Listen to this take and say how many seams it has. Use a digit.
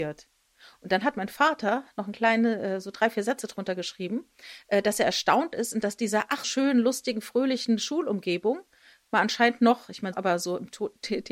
2